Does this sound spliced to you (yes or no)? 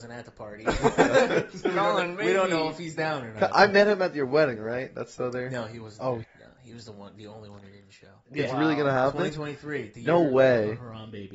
yes